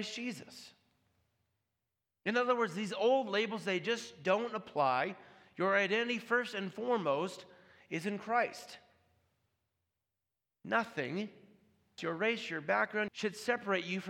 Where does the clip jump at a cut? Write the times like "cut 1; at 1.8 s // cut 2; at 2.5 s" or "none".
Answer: cut 1; at 12.0 s // cut 2; at 13.1 s